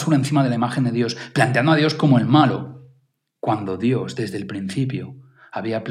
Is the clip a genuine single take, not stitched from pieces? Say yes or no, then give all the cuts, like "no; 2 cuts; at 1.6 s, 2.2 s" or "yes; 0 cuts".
yes; 0 cuts